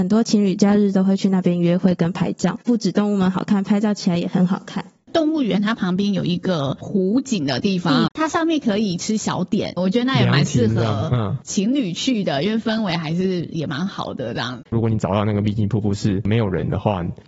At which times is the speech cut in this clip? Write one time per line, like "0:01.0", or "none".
0:08.1
0:09.8
0:14.7